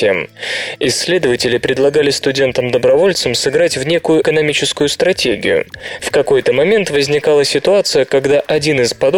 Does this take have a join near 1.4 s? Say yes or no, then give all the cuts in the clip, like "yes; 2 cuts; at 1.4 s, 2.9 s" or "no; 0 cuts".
no; 2 cuts; at 4.2 s, 6.0 s